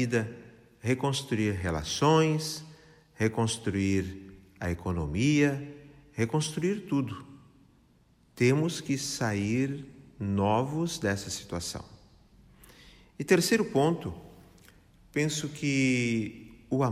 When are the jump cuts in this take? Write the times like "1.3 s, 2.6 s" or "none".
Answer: none